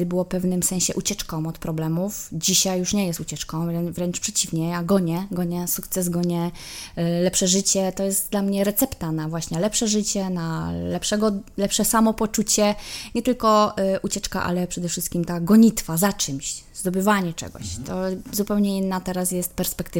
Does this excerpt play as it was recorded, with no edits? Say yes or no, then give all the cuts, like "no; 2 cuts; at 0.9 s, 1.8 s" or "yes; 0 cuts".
yes; 0 cuts